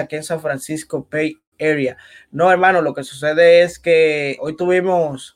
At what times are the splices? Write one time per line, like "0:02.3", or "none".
0:04.4